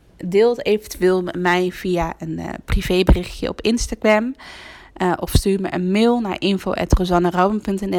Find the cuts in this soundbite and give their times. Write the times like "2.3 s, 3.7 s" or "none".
none